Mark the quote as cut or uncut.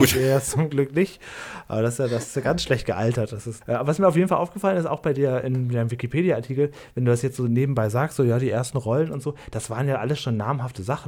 cut